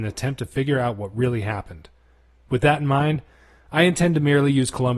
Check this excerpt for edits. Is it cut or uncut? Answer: uncut